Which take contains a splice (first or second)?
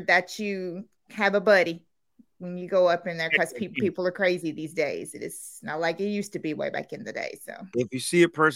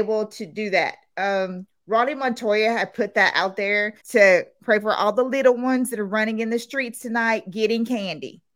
second